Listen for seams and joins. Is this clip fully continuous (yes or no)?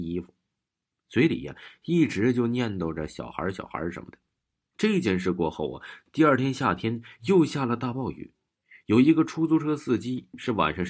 yes